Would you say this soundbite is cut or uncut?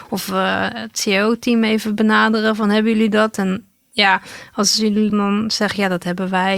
cut